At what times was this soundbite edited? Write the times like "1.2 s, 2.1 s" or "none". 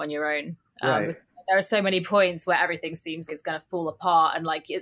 3.3 s

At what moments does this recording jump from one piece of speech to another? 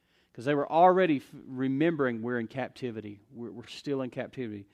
none

